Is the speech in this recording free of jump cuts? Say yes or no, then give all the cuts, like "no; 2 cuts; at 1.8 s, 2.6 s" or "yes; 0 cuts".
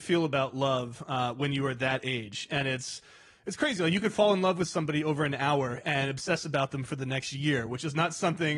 yes; 0 cuts